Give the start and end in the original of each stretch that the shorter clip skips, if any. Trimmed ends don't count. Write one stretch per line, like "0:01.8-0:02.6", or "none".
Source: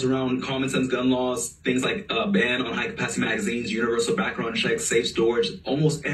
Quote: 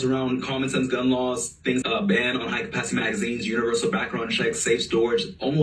0:01.8-0:02.1